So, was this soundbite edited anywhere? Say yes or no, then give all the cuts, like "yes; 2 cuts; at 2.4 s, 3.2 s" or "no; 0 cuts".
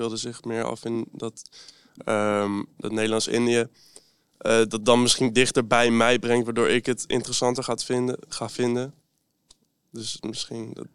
no; 0 cuts